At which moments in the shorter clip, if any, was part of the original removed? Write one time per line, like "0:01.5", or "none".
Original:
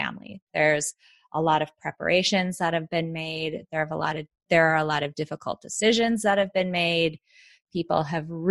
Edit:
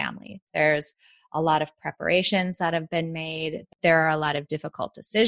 0:03.7

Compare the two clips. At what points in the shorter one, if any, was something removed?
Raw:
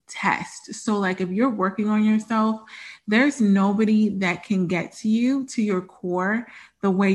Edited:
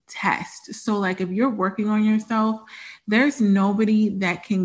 none

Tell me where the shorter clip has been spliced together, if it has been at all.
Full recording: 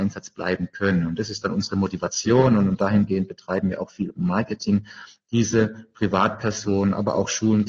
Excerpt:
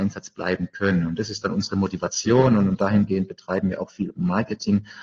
none

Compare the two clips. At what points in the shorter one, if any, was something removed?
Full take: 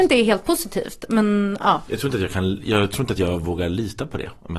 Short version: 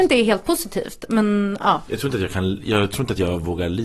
none

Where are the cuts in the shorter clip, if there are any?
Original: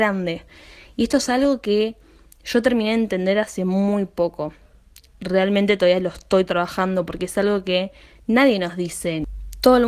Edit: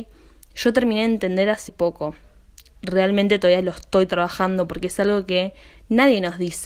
0:01.7

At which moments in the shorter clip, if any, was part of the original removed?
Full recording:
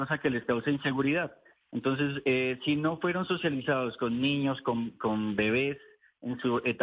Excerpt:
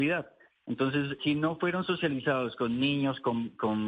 0:01.2

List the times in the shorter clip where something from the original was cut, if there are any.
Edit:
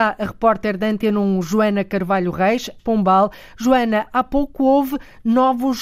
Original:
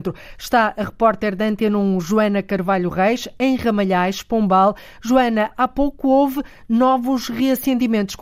0:02.8

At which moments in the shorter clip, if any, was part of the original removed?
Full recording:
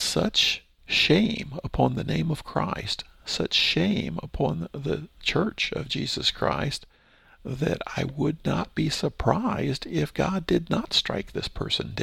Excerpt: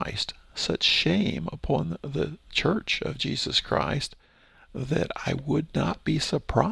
none

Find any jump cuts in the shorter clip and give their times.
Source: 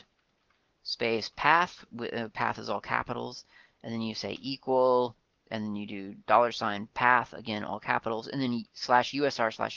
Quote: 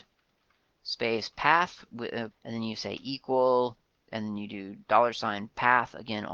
0:02.3

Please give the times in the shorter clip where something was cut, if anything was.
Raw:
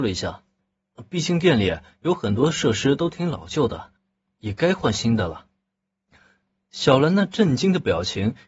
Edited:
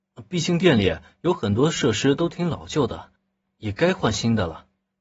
none

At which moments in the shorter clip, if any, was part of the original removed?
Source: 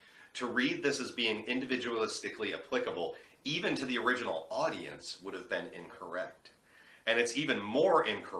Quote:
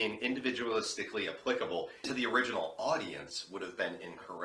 0:02.0

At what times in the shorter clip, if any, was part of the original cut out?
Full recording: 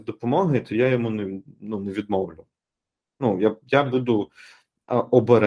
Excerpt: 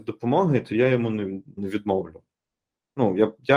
0:01.6

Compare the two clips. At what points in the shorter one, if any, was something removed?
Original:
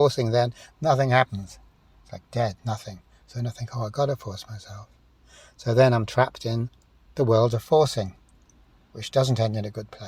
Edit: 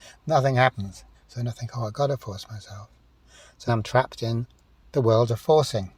0:01.1
0:03.7

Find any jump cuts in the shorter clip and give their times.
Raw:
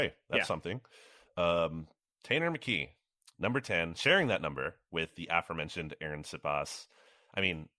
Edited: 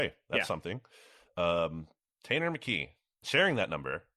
0:03.2

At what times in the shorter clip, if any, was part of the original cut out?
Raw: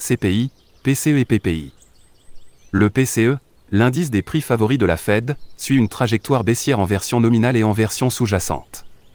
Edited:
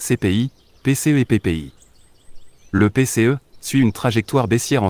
0:03.5

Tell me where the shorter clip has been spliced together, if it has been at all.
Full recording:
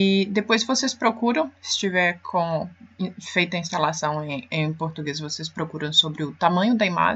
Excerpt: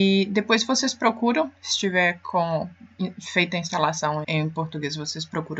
0:04.2

